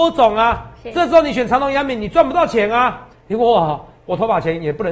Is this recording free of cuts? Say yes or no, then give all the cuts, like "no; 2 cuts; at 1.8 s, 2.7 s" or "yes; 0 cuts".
no; 1 cut; at 3.1 s